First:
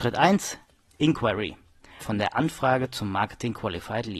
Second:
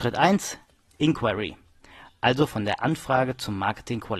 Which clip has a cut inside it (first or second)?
first